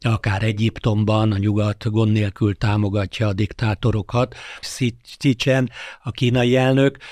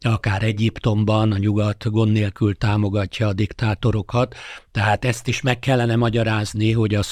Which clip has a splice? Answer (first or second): first